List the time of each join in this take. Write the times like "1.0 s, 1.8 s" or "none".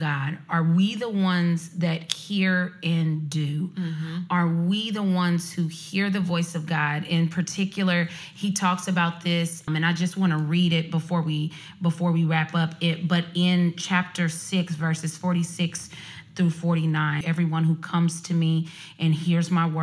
9.7 s, 17.2 s